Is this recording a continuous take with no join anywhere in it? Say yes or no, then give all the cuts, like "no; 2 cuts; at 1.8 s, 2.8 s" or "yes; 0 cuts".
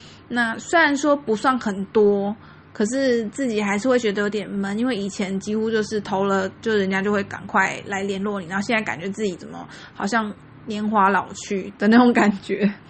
yes; 0 cuts